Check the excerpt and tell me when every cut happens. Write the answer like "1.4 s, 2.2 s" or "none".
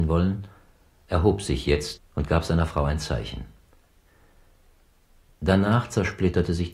2.0 s